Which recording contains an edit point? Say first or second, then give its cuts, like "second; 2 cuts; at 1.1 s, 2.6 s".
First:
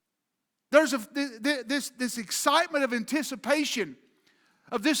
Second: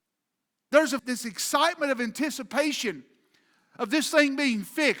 second; 1 cut; at 1.0 s